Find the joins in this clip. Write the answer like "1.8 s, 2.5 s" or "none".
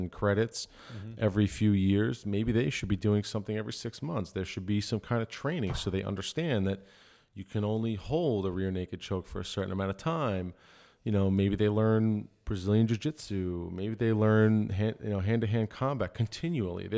none

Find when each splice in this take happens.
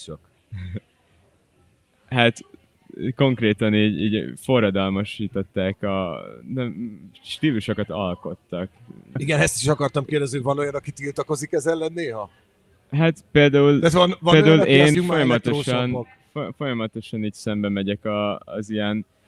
9.2 s, 14.9 s

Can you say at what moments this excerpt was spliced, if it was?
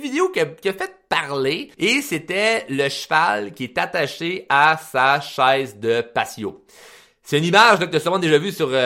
1.7 s

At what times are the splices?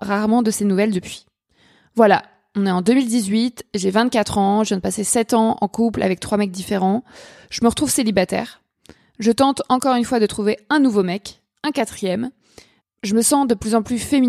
12.8 s

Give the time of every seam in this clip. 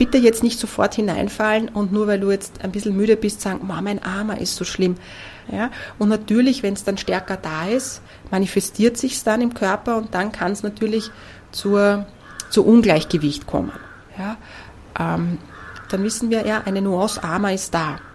5.4 s, 14.1 s, 15.9 s

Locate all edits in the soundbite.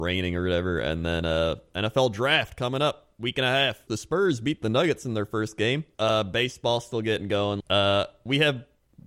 3.9 s, 5.9 s, 7.6 s

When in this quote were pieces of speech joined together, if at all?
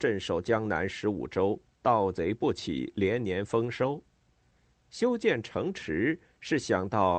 none

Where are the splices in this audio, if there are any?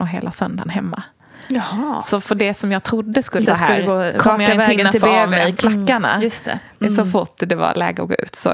3.4 s, 6.8 s

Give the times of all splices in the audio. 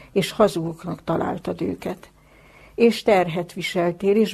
none

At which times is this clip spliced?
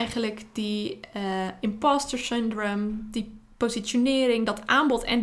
none

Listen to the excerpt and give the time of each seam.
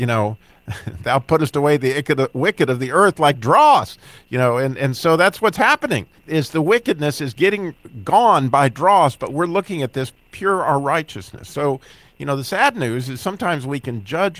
6.2 s

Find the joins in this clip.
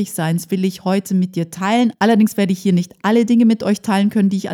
none

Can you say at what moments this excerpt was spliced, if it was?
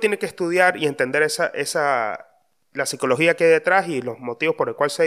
none

